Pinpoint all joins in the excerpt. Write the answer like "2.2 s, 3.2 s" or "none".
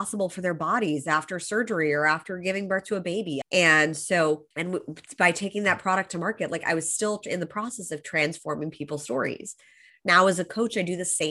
3.4 s, 4.5 s